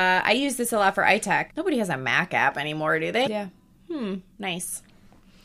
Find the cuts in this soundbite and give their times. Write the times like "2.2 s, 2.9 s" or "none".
1.5 s, 3.2 s

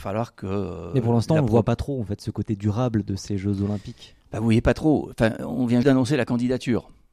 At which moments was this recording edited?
5.8 s

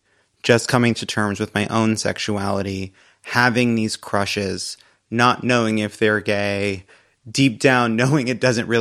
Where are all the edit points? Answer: none

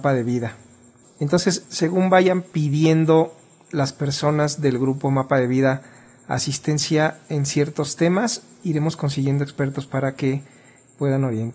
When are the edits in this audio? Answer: 1.0 s

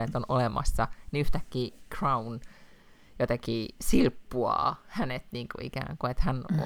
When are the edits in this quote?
3.8 s

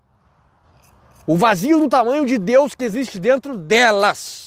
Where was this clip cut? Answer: none

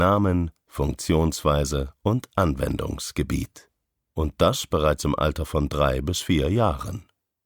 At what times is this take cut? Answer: none

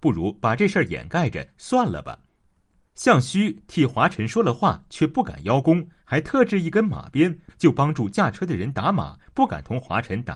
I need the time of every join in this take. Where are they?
2.8 s, 7.5 s, 9.2 s

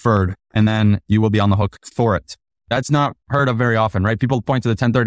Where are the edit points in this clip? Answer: 2.6 s

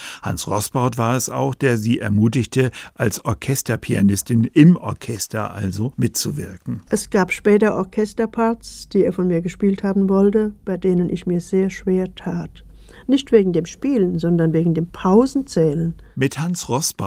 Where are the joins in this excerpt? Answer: 6.9 s

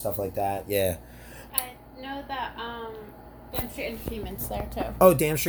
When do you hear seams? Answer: 1.5 s

